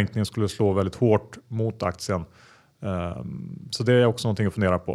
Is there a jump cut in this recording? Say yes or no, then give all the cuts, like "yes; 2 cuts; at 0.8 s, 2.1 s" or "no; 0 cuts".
no; 0 cuts